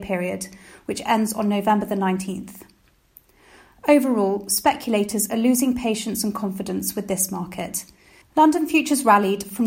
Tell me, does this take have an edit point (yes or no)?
yes